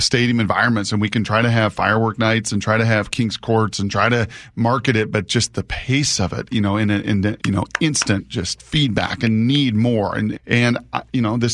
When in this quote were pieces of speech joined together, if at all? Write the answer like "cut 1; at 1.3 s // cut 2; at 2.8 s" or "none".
cut 1; at 7.4 s // cut 2; at 10.3 s